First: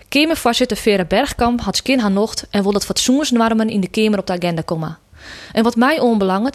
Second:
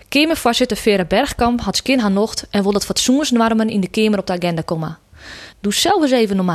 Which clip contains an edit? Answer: second; 1 cut; at 5.5 s

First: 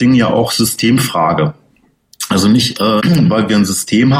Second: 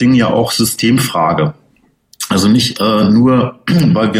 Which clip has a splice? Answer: first; 1 cut; at 3.0 s

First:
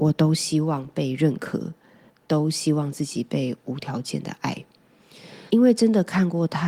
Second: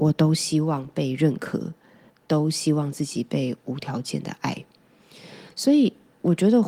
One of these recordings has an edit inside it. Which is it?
first; 1 cut; at 5.5 s

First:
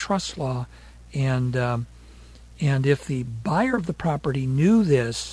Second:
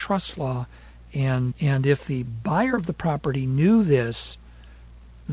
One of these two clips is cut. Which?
second; 1 cut; at 1.5 s

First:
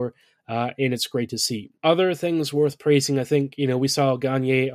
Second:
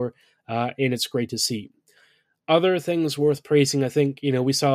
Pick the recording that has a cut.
first; 1 cut; at 1.8 s

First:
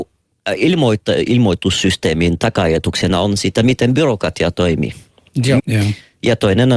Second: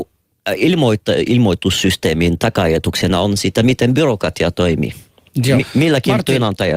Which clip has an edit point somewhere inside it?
first; 1 cut; at 5.6 s

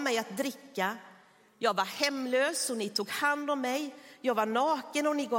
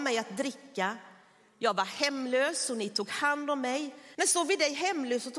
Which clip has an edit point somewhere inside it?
second; 1 cut; at 4.1 s

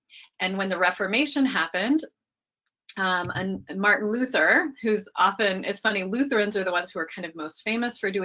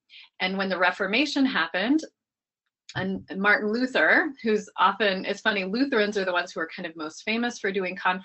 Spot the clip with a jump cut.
second; 1 cut; at 2.9 s

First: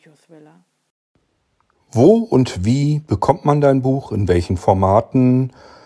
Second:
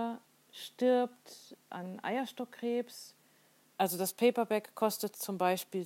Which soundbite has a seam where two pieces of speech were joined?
second; 2 cuts; at 1.7 s, 3.7 s

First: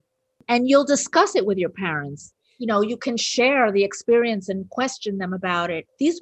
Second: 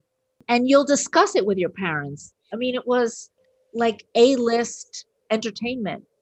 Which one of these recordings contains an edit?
second; 1 cut; at 2.5 s

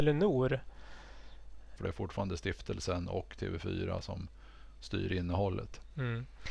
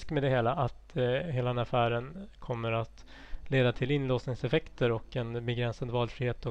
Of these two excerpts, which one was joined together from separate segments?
first; 1 cut; at 1.8 s

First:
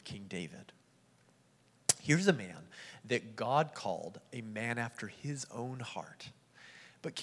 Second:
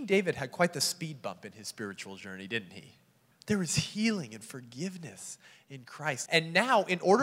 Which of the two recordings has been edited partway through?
second; 2 cuts; at 3.3 s, 6.3 s

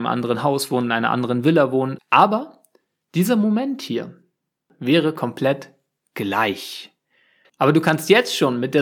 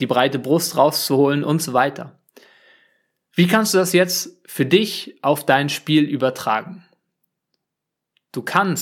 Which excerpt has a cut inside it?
first; 2 cuts; at 2.0 s, 7.4 s

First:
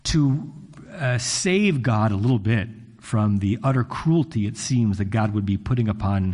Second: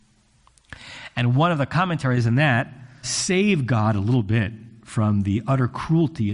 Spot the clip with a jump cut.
second; 1 cut; at 3.0 s

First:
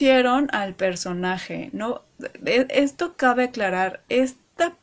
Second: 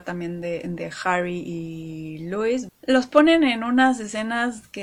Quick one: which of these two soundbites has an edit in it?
second; 1 cut; at 2.7 s

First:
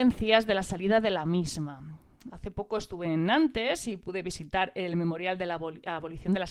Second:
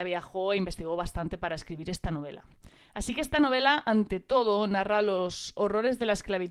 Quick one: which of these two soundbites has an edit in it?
first; 1 cut; at 2.3 s

